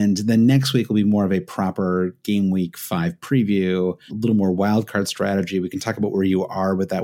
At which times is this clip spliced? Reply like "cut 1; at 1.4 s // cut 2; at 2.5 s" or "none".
cut 1; at 4.1 s